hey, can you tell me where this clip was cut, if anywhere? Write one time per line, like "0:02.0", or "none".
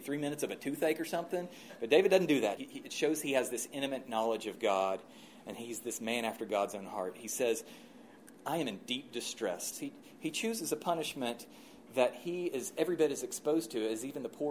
0:02.6
0:09.7